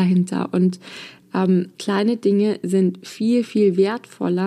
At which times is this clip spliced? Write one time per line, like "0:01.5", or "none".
0:01.7